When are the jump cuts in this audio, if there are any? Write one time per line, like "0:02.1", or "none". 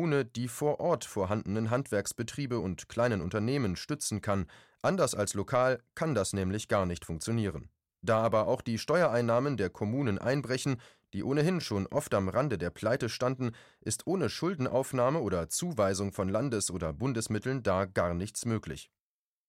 none